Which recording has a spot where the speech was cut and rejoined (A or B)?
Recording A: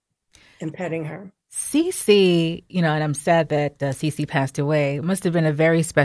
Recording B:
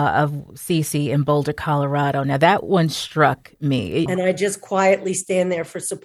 B